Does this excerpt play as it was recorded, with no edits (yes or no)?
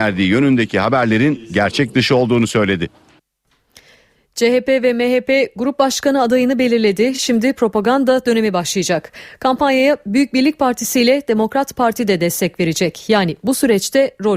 yes